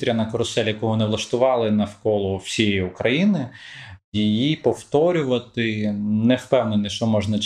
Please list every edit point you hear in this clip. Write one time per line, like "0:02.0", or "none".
none

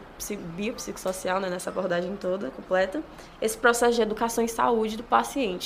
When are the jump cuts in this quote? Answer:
none

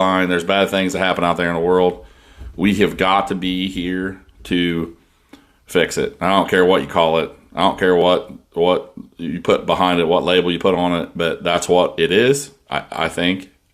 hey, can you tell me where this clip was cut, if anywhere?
none

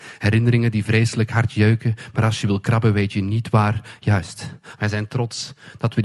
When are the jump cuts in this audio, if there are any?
0:04.8

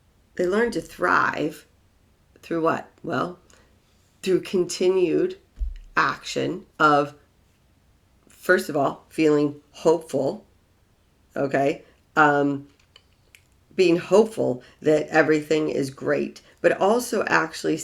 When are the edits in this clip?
0:06.7

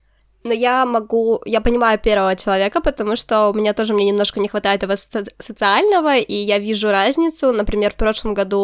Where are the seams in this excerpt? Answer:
none

